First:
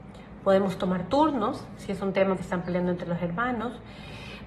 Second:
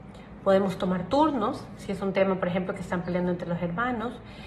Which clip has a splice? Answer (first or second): first